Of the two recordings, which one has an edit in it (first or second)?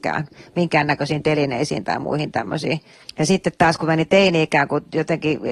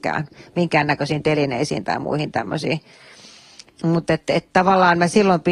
first